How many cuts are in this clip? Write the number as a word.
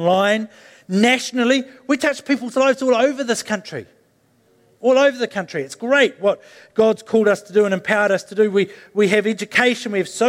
zero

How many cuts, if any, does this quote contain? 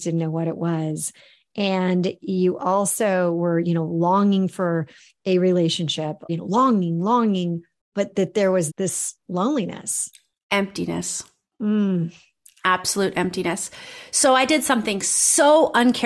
two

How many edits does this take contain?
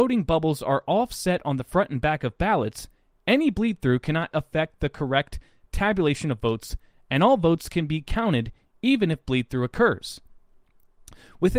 one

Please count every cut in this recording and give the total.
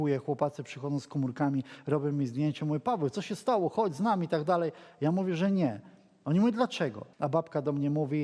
one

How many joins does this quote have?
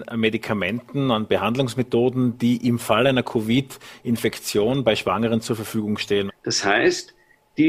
one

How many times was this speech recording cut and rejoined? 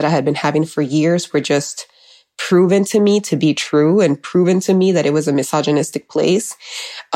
zero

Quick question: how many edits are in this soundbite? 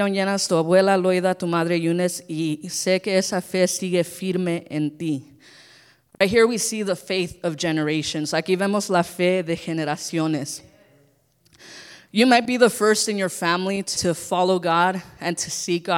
one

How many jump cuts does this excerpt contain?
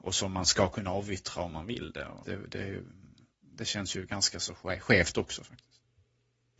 one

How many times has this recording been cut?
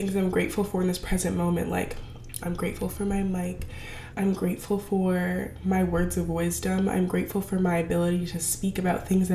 two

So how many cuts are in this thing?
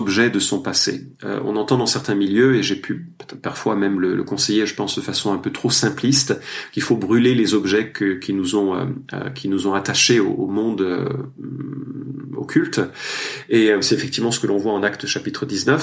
zero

